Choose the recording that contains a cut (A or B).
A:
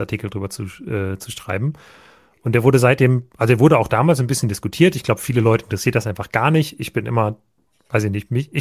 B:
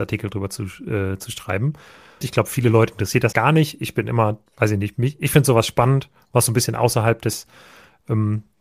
B